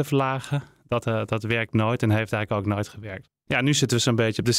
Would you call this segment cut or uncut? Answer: uncut